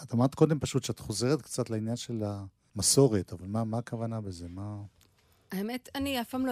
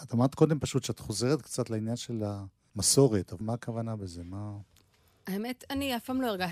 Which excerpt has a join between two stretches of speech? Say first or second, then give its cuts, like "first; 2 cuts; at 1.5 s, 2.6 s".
second; 1 cut; at 3.4 s